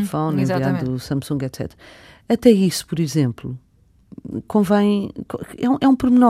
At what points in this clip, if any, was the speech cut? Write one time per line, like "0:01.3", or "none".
none